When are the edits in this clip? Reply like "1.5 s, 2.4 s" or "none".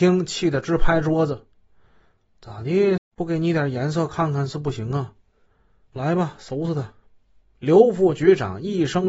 3.0 s